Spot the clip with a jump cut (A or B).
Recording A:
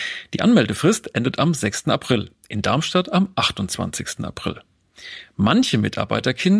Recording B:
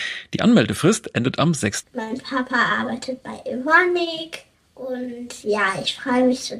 B